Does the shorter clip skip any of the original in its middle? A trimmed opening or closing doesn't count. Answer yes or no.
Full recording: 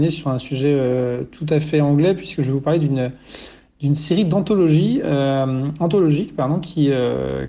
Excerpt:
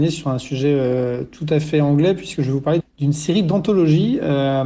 yes